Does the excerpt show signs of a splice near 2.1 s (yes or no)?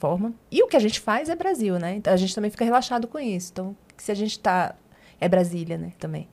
yes